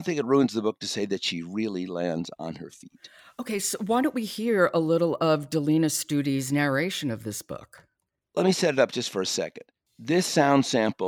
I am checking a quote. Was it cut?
no; 0 cuts

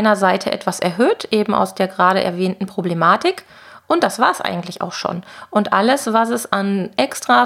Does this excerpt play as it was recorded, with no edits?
yes; 0 cuts

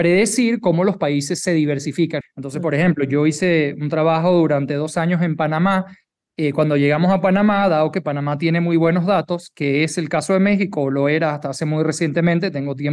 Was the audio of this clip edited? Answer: yes; 1 cut; at 2.2 s

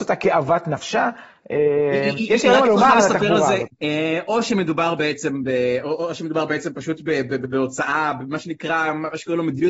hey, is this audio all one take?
no; 1 cut; at 3.7 s

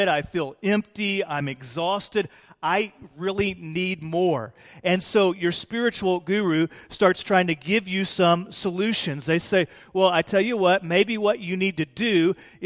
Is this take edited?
no; 0 cuts

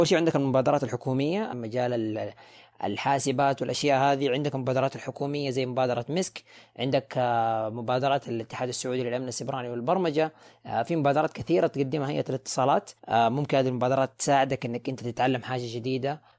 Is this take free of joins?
no; 2 cuts; at 1.5 s, 13.0 s

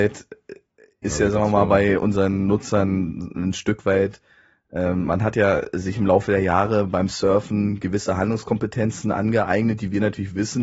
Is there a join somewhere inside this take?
no; 0 cuts

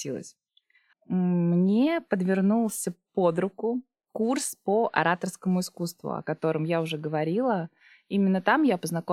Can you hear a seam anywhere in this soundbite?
yes; 1 cut; at 0.9 s

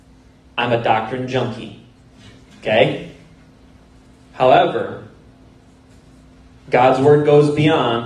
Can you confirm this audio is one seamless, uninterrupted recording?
yes; 0 cuts

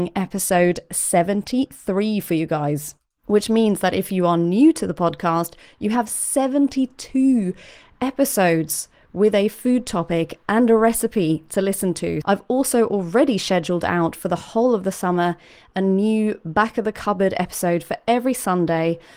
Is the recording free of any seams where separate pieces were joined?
no; 1 cut; at 12.2 s

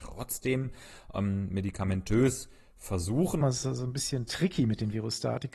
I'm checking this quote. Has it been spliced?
yes; 1 cut; at 3.4 s

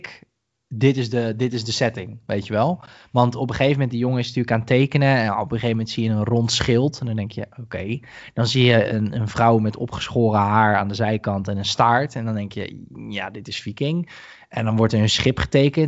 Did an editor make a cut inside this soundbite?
no; 0 cuts

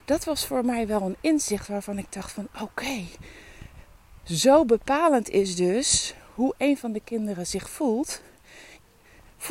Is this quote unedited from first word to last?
yes; 0 cuts

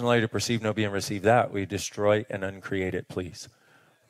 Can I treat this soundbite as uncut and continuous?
yes; 0 cuts

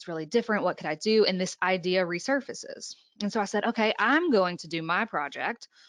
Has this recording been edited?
no; 0 cuts

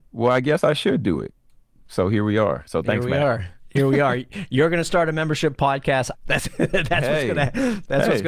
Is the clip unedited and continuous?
no; 1 cut; at 6.1 s

